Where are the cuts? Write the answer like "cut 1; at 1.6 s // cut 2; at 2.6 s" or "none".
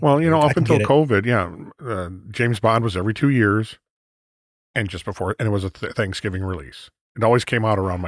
none